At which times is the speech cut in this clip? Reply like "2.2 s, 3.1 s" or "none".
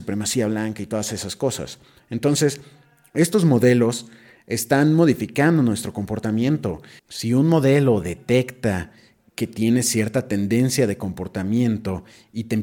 7.0 s